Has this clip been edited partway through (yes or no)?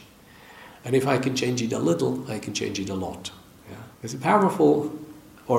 yes